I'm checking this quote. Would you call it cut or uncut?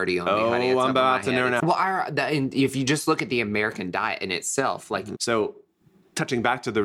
cut